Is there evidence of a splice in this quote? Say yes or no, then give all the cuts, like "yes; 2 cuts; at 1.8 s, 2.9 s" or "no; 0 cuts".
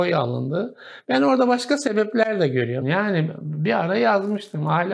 yes; 1 cut; at 2.8 s